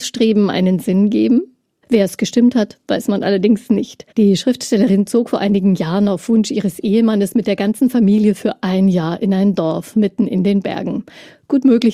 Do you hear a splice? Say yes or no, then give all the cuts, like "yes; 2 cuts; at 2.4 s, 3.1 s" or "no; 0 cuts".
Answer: yes; 2 cuts; at 1.8 s, 4.1 s